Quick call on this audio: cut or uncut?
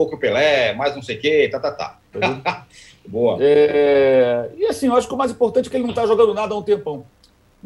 cut